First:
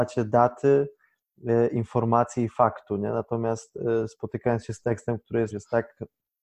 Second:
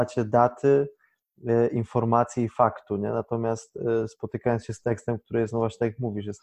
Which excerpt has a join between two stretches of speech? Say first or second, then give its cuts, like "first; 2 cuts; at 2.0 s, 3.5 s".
first; 1 cut; at 5.5 s